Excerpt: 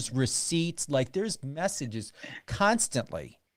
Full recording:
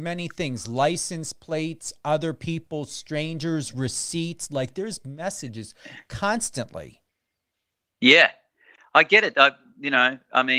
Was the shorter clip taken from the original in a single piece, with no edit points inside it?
yes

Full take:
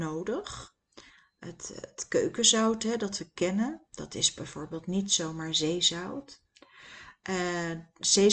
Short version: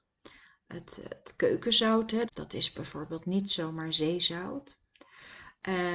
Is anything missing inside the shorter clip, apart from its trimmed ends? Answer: yes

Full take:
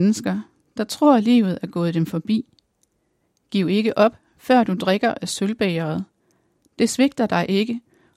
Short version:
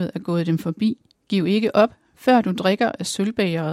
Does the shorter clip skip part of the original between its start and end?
yes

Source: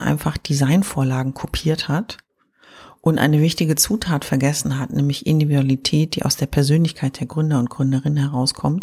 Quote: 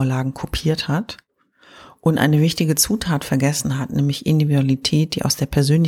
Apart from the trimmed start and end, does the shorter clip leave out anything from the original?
no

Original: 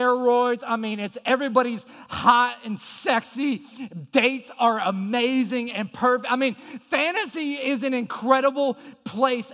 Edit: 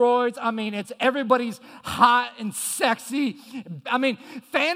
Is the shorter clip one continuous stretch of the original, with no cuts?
no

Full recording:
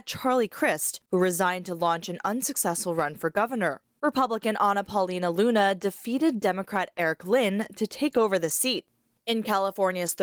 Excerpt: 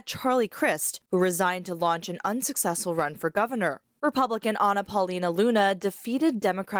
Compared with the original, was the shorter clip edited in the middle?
no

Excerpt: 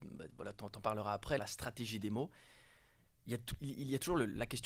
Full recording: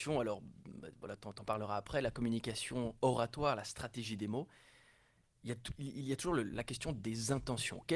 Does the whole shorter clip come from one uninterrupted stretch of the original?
no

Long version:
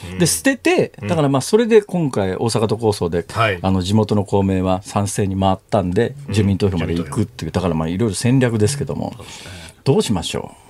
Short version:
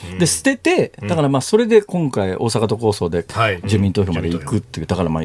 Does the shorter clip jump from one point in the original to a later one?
yes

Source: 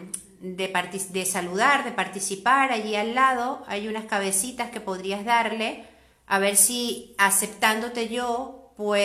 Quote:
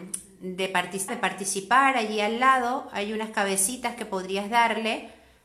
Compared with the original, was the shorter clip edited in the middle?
yes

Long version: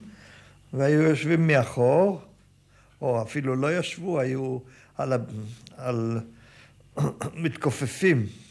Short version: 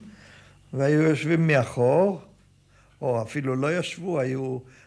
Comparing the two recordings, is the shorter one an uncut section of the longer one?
yes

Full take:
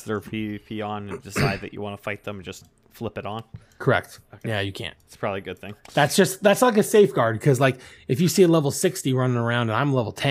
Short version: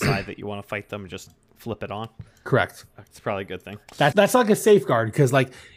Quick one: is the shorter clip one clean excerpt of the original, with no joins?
no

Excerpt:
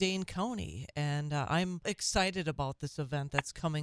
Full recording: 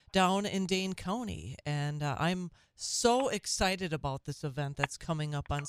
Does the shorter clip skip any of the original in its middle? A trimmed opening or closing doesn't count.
yes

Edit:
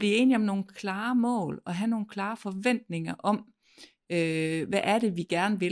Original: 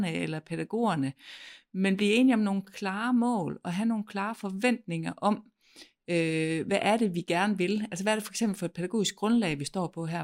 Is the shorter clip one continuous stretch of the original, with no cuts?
yes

